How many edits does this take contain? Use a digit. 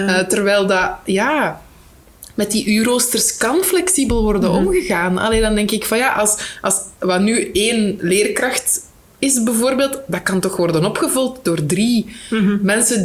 0